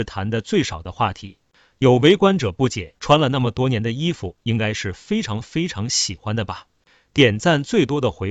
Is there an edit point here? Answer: yes; 2 cuts; at 1.7 s, 3.0 s

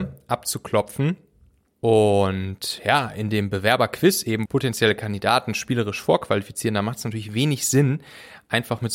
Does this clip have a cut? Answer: yes; 2 cuts; at 1.7 s, 4.5 s

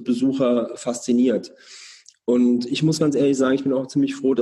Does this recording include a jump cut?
no; 0 cuts

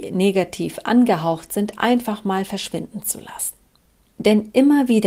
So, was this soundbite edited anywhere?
no; 0 cuts

